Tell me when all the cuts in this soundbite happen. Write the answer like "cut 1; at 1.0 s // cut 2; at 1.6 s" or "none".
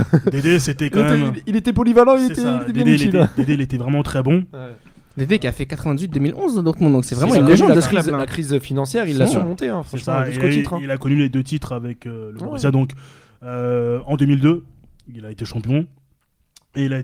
none